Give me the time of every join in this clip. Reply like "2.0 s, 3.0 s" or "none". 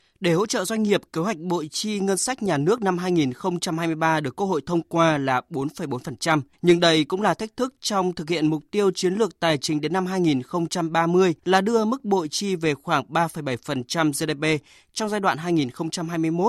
6.5 s, 11.4 s